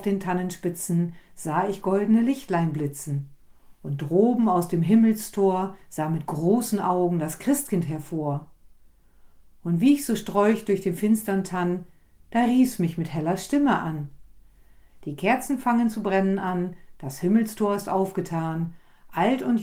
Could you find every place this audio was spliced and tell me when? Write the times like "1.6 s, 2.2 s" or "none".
15.0 s